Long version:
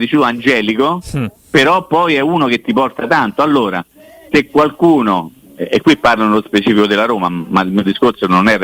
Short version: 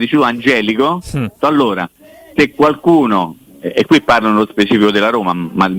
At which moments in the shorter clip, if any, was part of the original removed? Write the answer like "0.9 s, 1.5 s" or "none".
1.4 s